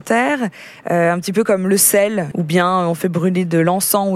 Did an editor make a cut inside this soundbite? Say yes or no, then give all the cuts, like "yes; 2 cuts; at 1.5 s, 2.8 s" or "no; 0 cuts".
yes; 1 cut; at 2.3 s